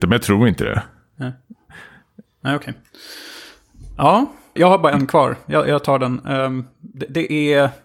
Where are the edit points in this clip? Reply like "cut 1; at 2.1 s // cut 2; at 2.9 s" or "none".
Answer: cut 1; at 4.6 s